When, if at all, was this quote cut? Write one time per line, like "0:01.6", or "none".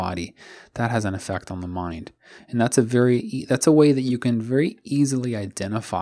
none